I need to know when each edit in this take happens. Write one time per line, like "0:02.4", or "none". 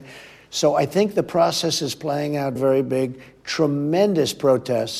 0:02.6